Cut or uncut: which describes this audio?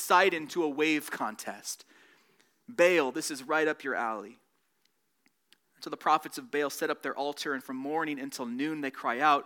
uncut